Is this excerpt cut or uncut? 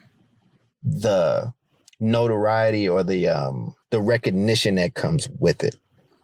cut